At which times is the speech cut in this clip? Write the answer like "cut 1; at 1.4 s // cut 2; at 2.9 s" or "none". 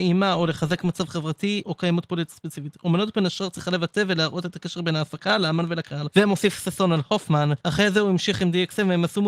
cut 1; at 7.6 s

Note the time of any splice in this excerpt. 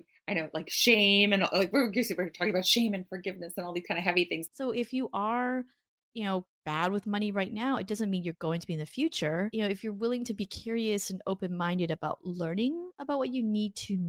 cut 1; at 4.5 s

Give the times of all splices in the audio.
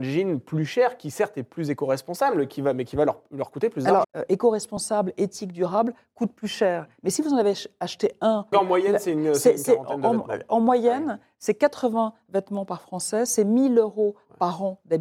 cut 1; at 4.0 s // cut 2; at 8.5 s

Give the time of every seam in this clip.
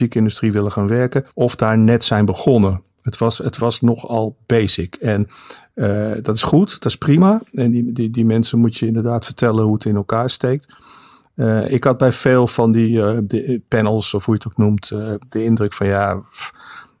cut 1; at 1.3 s

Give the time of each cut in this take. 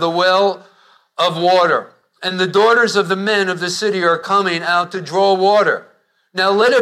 none

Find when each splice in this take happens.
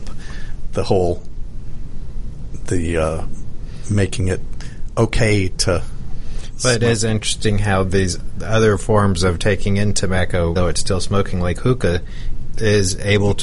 cut 1; at 10.6 s // cut 2; at 12.5 s

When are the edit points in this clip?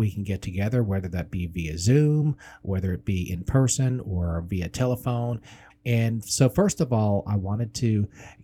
cut 1; at 5.7 s

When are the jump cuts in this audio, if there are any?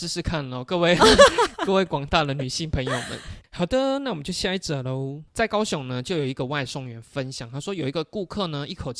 none

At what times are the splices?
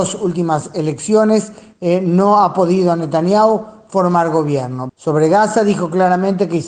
cut 1; at 4.9 s

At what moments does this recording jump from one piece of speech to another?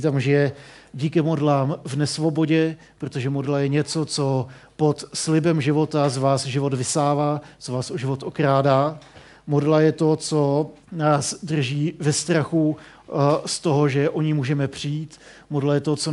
cut 1; at 10.8 s

